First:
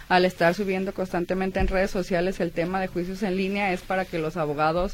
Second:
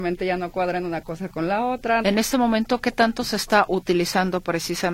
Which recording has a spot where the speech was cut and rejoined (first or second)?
second